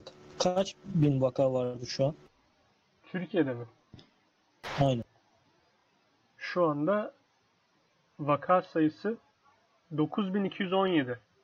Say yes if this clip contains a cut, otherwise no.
no